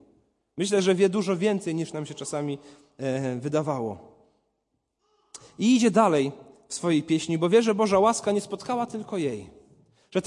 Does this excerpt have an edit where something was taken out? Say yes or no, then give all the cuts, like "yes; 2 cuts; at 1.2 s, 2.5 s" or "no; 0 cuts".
no; 0 cuts